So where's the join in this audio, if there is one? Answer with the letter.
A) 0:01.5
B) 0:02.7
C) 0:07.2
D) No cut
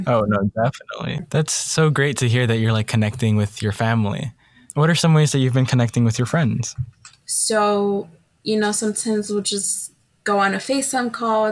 C